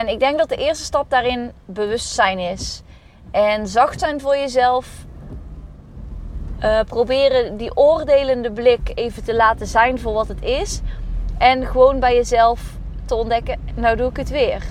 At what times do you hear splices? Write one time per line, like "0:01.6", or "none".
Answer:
0:13.7